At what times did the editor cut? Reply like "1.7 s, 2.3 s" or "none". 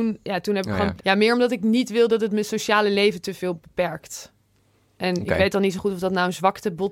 1.0 s